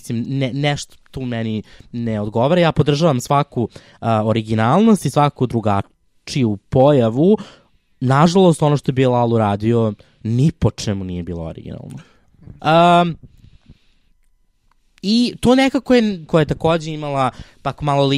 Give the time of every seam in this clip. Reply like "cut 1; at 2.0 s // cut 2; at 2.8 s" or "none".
cut 1; at 12.6 s // cut 2; at 16.3 s